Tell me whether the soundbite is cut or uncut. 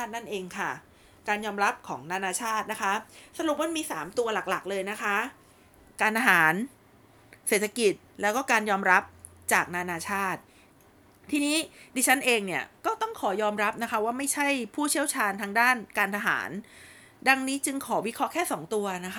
uncut